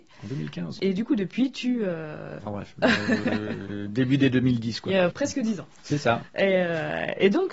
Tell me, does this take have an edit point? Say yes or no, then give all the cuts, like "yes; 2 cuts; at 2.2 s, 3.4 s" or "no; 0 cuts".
yes; 2 cuts; at 2.4 s, 5.1 s